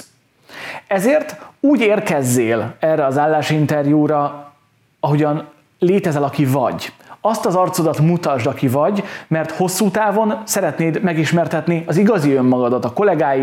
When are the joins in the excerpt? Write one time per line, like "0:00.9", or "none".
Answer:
none